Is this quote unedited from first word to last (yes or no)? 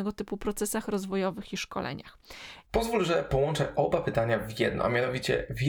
no